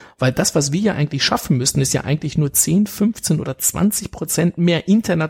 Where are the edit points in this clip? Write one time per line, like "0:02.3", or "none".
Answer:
none